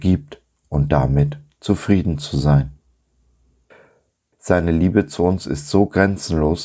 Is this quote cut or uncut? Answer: cut